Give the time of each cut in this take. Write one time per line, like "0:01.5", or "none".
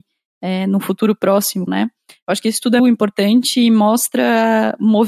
0:01.7
0:02.8